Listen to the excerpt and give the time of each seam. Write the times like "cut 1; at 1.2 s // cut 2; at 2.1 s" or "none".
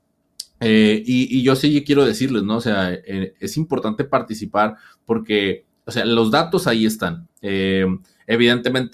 cut 1; at 7.3 s